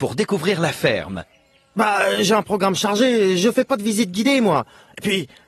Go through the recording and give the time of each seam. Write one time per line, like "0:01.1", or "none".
none